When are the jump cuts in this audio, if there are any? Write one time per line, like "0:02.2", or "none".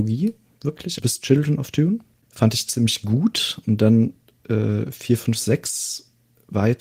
0:01.0